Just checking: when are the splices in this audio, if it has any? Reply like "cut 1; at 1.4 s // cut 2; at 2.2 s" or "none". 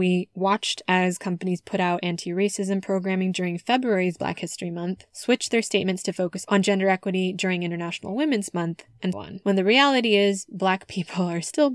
cut 1; at 9.1 s

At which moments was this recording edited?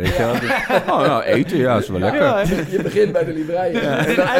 cut 1; at 2.4 s

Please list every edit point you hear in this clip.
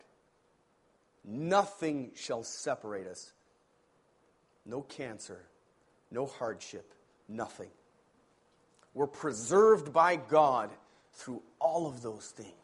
none

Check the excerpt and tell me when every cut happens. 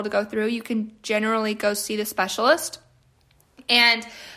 none

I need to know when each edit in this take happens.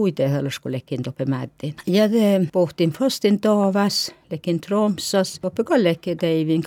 none

